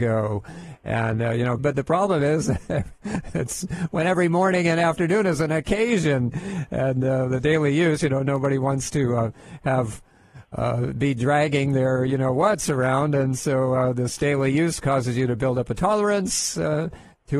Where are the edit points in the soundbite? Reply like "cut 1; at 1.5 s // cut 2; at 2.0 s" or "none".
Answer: cut 1; at 1.6 s